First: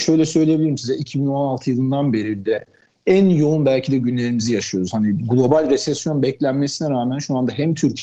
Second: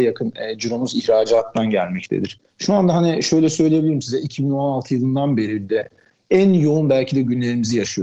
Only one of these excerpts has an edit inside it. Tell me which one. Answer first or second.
second